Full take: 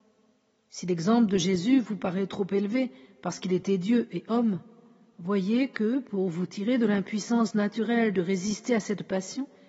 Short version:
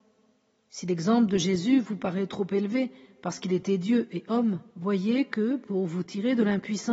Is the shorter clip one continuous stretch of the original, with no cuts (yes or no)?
no